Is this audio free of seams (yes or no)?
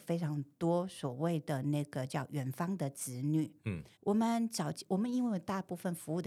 no